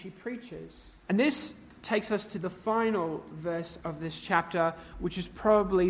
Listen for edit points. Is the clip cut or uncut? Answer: cut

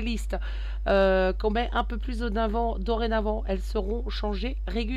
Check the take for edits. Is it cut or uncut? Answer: uncut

